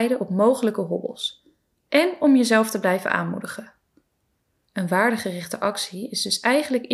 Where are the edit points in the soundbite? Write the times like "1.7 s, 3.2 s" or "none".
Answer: 4.6 s